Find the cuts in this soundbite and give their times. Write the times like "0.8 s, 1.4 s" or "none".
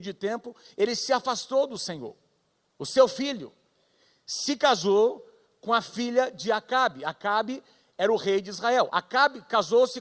8.9 s